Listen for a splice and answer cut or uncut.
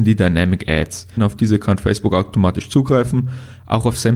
cut